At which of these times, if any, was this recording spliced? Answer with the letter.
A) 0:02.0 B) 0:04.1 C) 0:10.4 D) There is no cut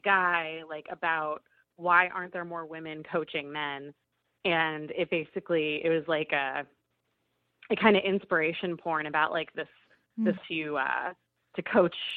C